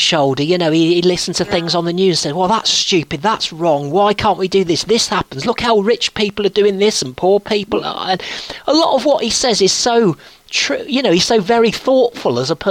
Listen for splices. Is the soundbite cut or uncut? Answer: uncut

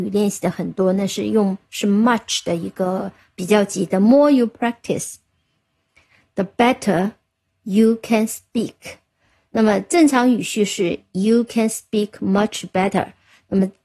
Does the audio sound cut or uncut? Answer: uncut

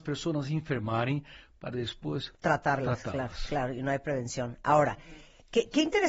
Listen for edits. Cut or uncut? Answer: uncut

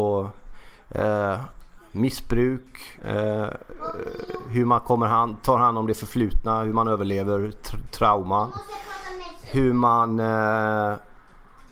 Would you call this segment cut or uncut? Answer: cut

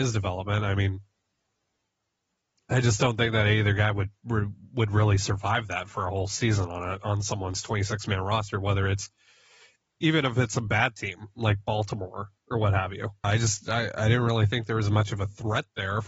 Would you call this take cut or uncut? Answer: cut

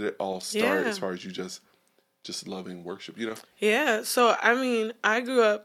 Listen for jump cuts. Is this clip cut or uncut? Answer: uncut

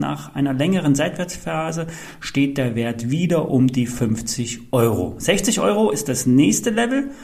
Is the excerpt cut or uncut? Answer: uncut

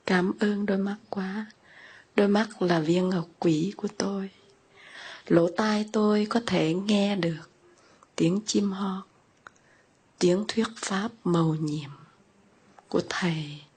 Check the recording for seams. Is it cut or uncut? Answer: uncut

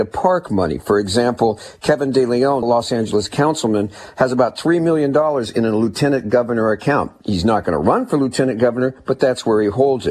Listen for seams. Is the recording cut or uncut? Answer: cut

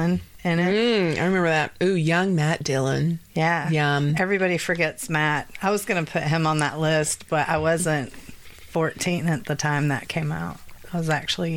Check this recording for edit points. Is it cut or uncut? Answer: cut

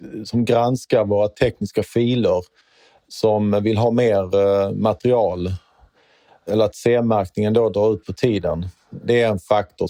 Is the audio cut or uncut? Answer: uncut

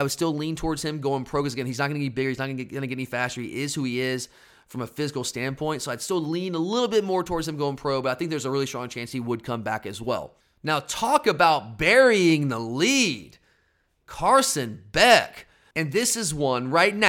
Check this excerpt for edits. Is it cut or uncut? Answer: cut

